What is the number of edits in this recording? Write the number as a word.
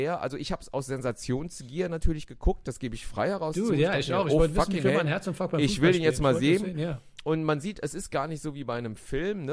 zero